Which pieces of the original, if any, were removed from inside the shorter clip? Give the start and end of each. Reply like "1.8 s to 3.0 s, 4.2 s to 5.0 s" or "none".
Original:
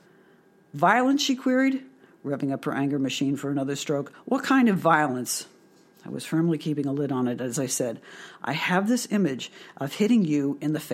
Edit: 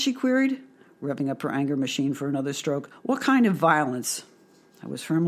none